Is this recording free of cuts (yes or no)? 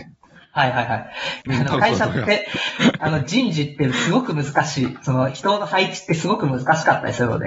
no